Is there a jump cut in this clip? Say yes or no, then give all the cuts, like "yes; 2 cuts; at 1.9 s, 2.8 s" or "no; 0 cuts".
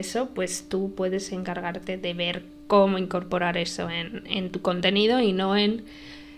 no; 0 cuts